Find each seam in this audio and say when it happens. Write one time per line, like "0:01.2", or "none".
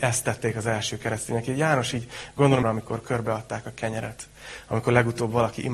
0:02.6